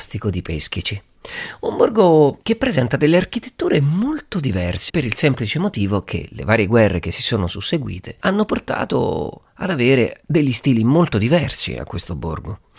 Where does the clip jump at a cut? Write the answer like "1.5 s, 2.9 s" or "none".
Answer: 2.4 s, 4.9 s

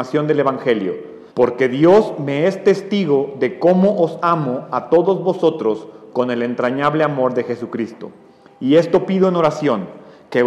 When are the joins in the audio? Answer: 1.3 s

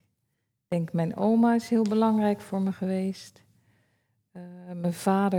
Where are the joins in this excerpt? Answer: none

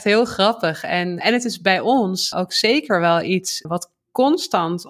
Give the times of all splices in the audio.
1.2 s, 2.3 s, 3.6 s

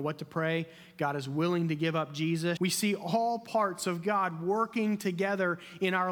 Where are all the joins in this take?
2.6 s

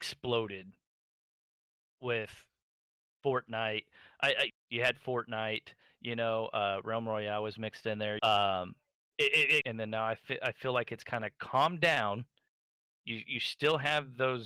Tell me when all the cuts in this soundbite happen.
4.5 s, 8.2 s, 9.6 s

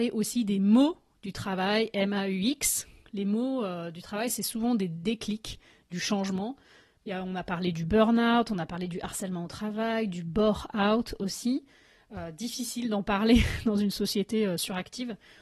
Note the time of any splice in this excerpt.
7.0 s

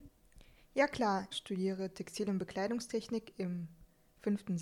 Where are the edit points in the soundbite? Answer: 1.3 s

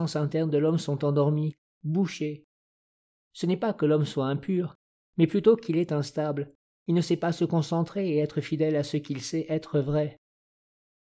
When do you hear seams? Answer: 1.7 s

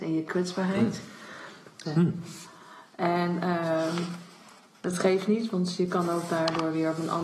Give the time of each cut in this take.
1.8 s

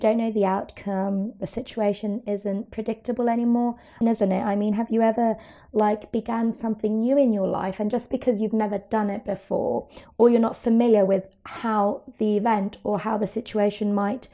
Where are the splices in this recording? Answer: 4.0 s

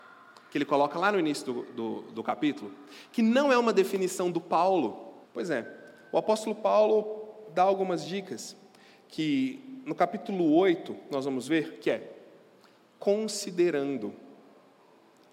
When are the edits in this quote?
5.2 s

